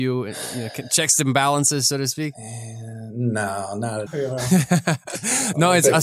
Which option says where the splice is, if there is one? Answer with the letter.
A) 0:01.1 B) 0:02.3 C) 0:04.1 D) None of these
C